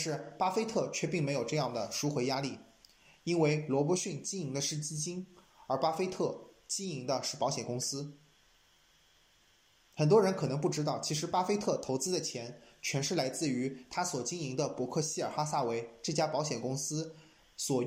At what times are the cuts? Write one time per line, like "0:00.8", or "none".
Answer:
none